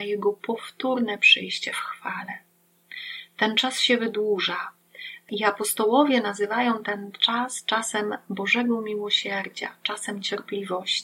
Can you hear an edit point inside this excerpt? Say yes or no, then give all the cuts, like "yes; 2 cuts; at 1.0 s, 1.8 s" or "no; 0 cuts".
no; 0 cuts